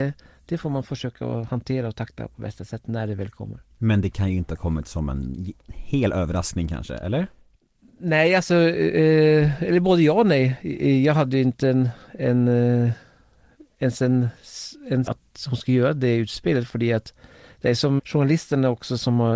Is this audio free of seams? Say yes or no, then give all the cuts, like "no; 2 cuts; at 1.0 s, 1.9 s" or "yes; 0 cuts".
no; 2 cuts; at 15.1 s, 18.0 s